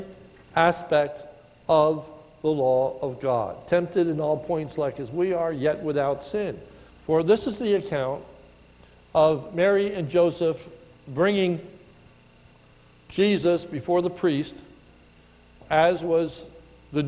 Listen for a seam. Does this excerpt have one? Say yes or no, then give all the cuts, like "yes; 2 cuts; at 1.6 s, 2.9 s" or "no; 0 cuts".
yes; 2 cuts; at 6.9 s, 15.6 s